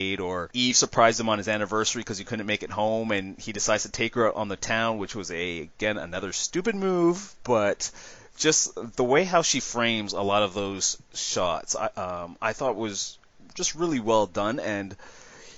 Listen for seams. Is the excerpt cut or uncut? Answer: uncut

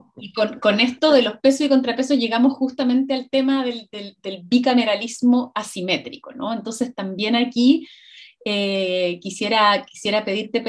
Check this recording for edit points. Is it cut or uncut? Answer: uncut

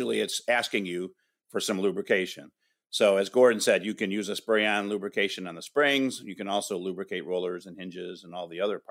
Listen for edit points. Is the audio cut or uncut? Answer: uncut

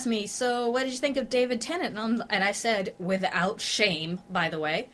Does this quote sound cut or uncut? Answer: uncut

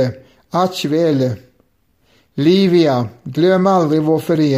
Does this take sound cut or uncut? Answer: uncut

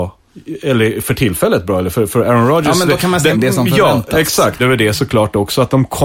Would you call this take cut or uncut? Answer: cut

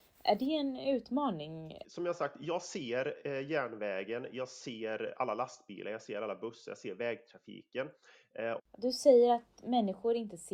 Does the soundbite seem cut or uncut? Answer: cut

